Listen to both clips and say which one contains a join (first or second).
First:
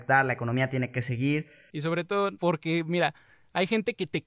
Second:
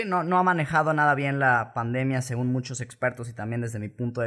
first